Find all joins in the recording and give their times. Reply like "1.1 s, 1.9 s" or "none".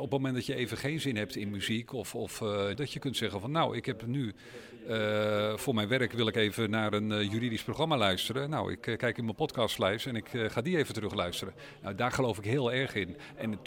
2.7 s

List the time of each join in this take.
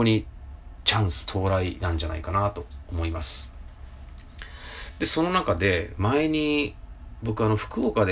none

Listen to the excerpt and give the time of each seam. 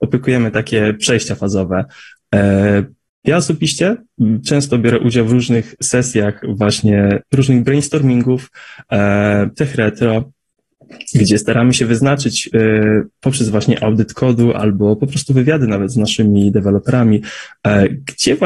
none

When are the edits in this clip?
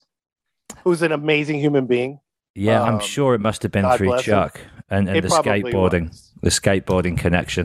none

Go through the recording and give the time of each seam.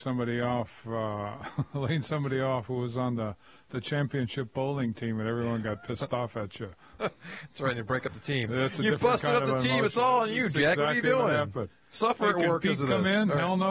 none

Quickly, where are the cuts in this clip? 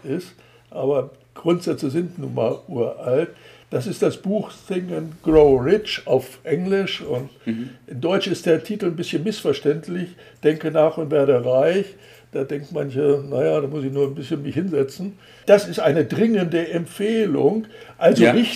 15.4 s

